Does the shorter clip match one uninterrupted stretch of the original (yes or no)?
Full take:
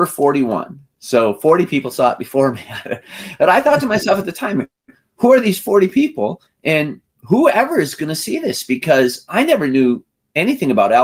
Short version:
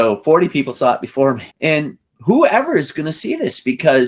no